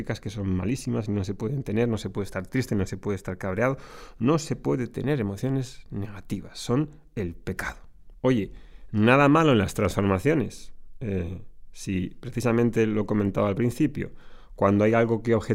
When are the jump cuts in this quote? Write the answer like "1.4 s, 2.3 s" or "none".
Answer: 8.1 s